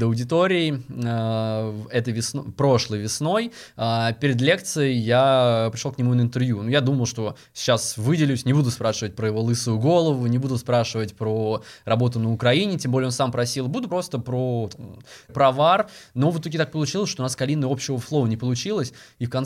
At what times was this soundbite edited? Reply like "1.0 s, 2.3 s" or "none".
13.9 s, 15.3 s

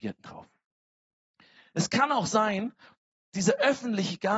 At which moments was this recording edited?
3.2 s

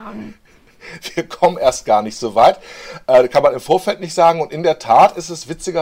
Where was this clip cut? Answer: none

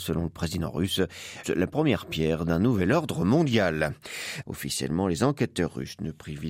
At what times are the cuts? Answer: 1.4 s, 4.4 s

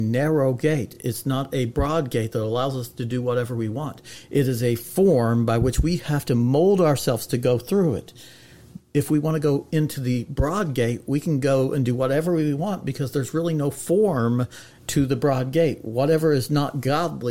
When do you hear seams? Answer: none

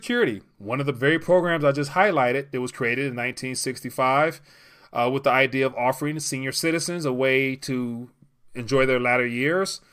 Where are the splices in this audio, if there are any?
none

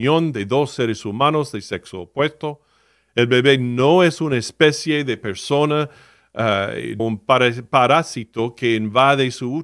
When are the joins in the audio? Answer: 7.0 s

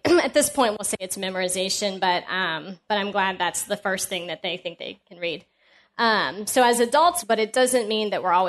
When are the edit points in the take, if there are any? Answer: 7.2 s

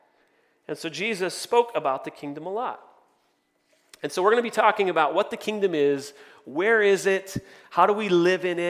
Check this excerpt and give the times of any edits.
none

